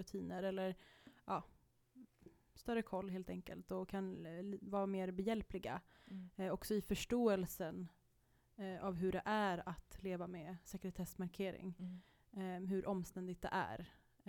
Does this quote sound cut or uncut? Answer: uncut